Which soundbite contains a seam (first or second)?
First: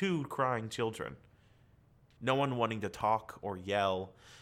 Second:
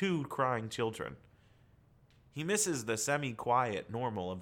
first